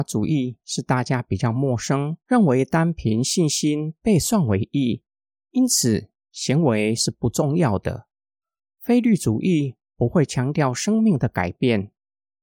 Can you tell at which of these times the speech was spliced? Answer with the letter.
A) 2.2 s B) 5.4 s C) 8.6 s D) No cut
A